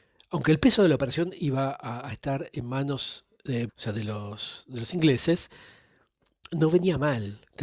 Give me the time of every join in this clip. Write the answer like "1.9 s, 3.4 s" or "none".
3.7 s